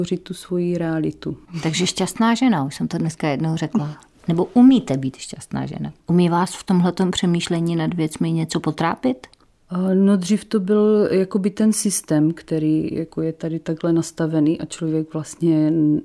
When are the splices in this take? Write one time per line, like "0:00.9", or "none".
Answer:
0:06.0